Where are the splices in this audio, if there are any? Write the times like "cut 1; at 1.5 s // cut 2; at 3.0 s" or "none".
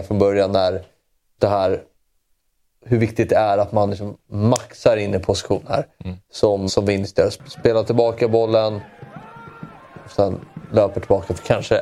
cut 1; at 1.4 s // cut 2; at 6.7 s